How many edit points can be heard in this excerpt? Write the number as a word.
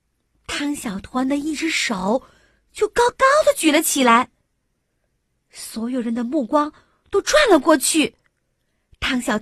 zero